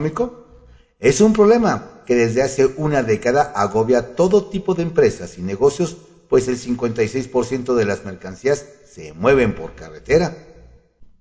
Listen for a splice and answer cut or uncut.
uncut